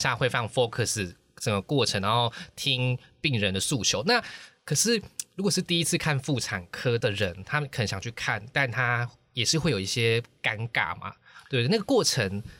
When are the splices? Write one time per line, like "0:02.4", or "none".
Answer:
none